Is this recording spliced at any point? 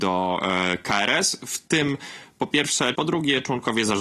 yes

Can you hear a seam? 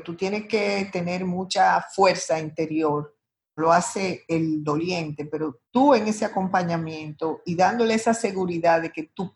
yes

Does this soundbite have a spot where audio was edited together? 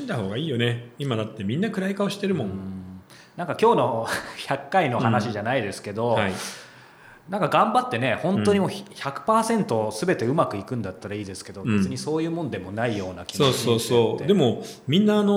no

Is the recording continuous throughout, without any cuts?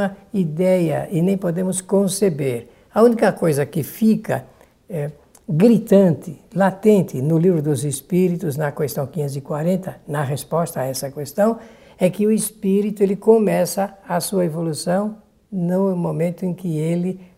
yes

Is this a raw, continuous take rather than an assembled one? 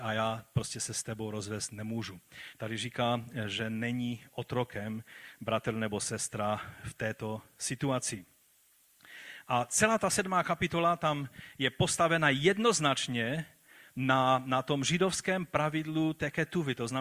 yes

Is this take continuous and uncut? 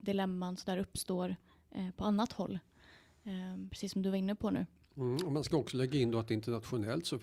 yes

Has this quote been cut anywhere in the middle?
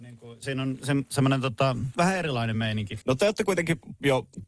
yes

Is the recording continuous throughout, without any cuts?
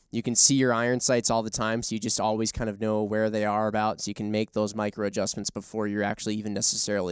yes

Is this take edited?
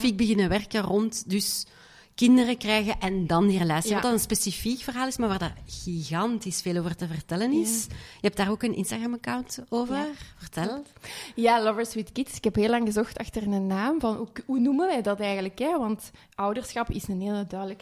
no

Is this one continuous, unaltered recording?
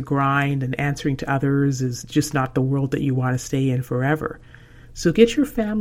yes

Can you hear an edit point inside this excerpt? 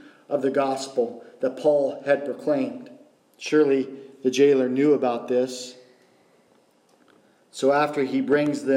yes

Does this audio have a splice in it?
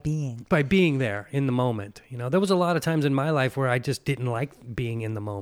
no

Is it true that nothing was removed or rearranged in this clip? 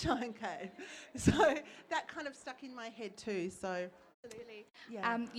no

